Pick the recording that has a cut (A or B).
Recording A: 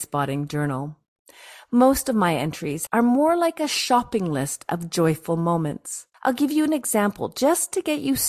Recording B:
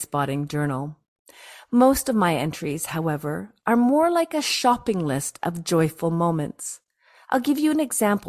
A